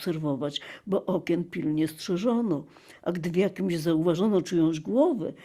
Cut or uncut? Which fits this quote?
uncut